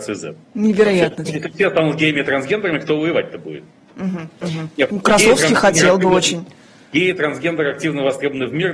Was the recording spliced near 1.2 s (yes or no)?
yes